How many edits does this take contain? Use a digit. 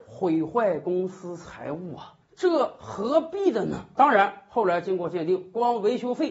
2